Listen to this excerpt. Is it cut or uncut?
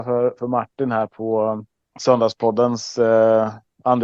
uncut